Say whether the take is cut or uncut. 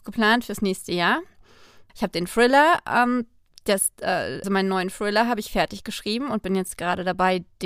cut